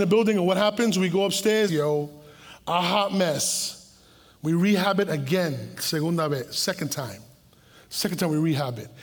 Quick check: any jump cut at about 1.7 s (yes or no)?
yes